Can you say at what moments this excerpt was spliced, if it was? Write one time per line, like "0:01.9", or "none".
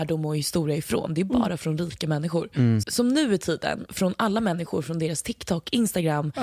0:02.8
0:03.9